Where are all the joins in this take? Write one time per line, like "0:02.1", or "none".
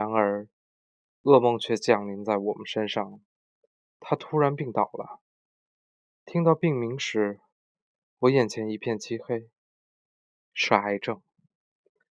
none